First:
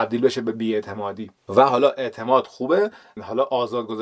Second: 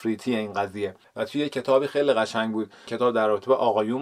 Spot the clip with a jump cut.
first; 1 cut; at 1.4 s

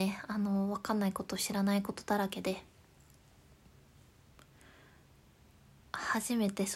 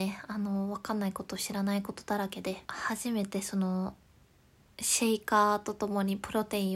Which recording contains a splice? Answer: second; 1 cut; at 2.7 s

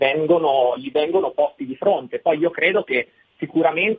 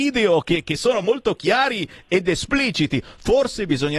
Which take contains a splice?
second; 1 cut; at 1.0 s

